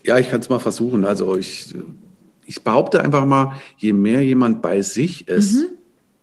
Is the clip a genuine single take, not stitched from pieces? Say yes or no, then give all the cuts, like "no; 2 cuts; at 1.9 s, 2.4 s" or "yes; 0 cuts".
yes; 0 cuts